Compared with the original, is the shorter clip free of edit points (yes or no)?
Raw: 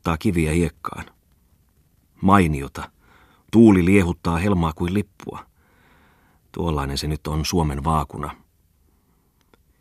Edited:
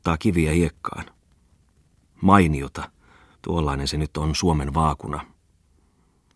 no